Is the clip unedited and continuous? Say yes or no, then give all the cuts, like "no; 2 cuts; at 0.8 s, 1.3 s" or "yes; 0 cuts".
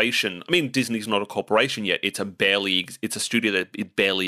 yes; 0 cuts